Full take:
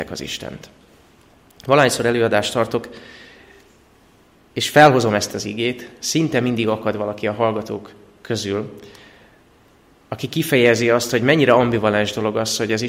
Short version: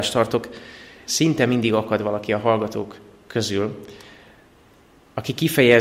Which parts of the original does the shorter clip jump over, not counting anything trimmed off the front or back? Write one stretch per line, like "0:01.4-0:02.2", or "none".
0:03.4-0:06.0